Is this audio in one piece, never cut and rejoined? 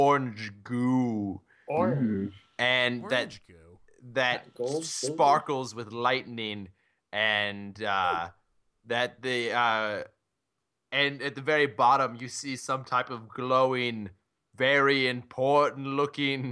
yes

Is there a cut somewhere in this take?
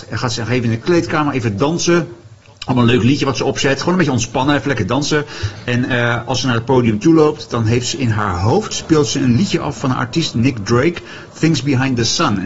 no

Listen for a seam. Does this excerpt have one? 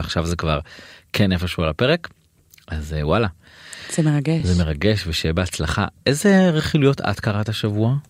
no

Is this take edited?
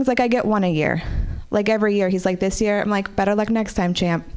no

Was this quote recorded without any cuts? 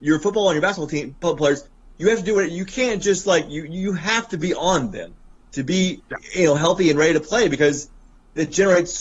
yes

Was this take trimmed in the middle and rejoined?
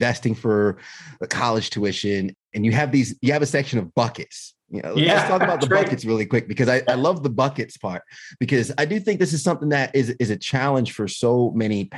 no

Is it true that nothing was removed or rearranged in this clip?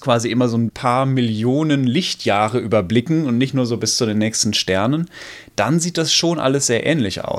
yes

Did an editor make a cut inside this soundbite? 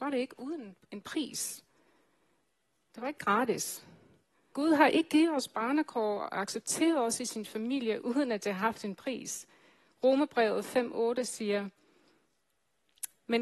yes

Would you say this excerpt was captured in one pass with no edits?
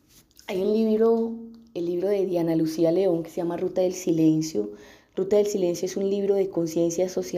yes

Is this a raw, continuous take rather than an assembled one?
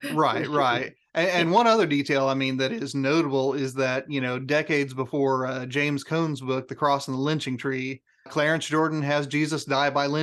no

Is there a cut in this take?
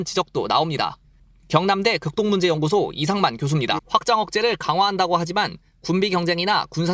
yes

